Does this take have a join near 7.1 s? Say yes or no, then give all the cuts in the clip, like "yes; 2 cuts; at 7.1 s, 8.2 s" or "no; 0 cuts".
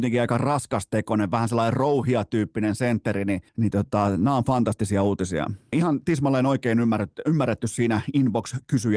no; 2 cuts; at 3.5 s, 5.7 s